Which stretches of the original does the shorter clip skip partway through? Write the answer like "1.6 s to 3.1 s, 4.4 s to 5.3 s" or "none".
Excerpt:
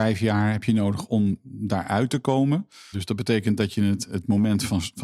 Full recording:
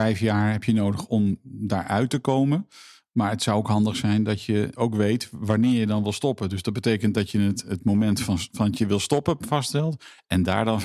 2.9 s to 6.5 s